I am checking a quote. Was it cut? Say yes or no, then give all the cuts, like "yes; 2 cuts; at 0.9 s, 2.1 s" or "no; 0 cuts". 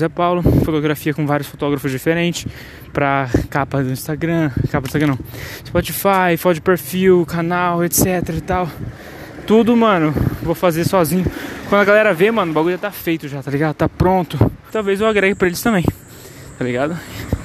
yes; 1 cut; at 14.7 s